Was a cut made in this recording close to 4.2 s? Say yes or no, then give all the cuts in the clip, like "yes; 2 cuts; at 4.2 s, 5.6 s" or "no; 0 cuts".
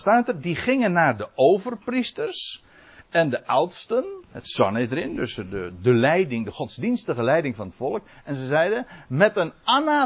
yes; 1 cut; at 4.2 s